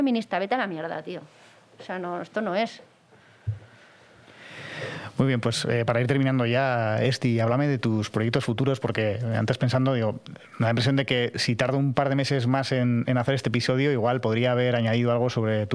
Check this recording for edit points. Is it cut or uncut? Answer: uncut